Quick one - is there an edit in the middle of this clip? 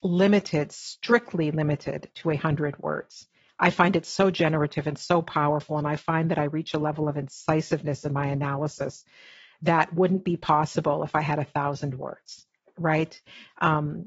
no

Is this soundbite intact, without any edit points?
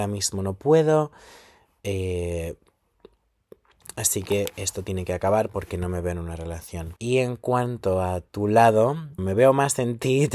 no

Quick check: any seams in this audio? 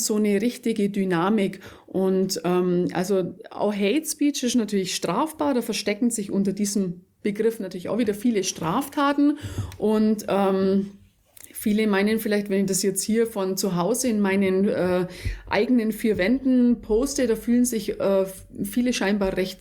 no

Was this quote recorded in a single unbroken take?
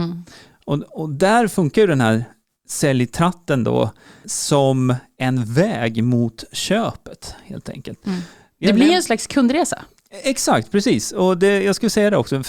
yes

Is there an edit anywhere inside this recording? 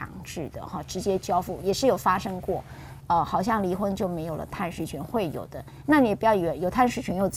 yes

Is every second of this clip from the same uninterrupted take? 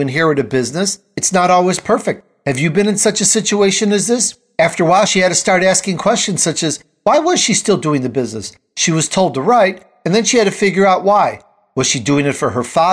yes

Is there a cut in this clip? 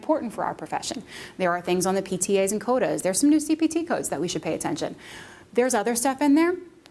no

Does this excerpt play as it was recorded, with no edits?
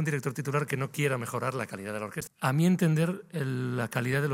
no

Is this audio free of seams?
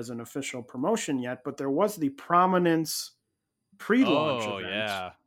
yes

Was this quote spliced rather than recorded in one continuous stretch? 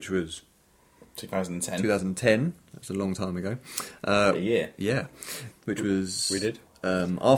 yes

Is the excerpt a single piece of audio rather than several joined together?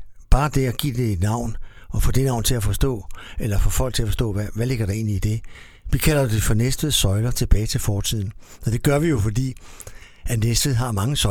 yes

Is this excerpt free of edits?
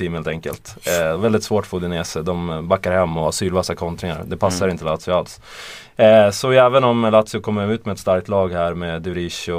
yes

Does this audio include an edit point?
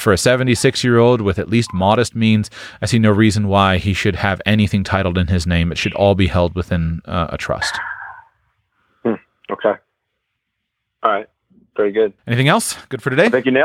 yes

